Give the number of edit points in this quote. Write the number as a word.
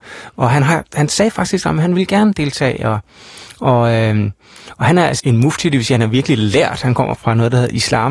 two